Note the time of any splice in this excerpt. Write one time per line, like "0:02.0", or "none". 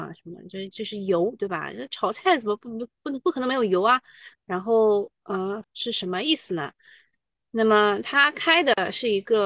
0:04.3
0:05.6
0:07.4